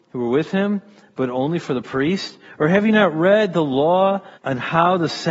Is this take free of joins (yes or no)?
no